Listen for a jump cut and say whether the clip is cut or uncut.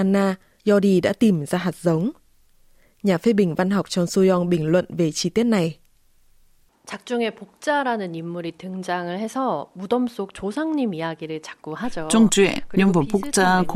uncut